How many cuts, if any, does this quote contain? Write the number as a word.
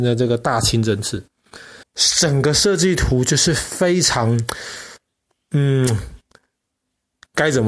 one